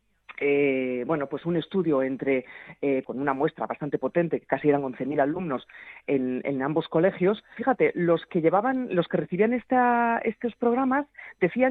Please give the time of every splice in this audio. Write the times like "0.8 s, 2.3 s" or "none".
3.0 s, 7.6 s